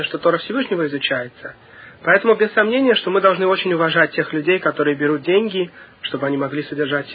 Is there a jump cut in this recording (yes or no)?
no